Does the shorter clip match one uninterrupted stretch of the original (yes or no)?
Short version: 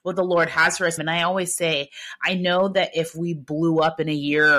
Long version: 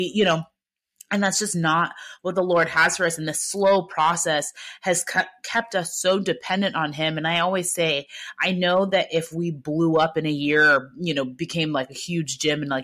no